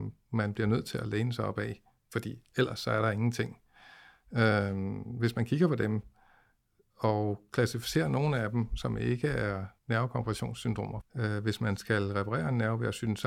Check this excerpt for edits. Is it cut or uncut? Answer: cut